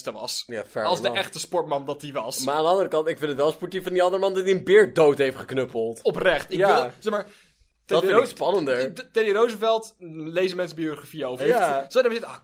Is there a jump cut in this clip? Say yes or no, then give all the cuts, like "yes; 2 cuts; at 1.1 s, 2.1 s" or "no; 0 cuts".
yes; 1 cut; at 11.4 s